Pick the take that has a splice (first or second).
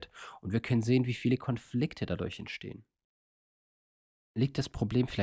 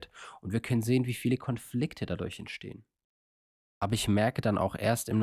second